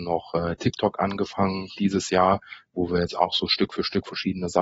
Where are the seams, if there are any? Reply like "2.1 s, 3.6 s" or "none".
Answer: 1.7 s